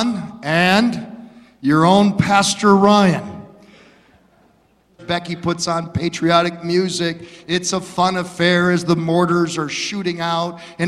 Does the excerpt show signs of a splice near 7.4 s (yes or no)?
no